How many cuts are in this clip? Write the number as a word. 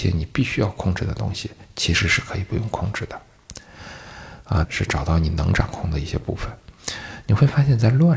one